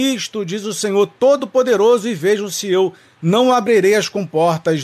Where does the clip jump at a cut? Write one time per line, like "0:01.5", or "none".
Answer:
none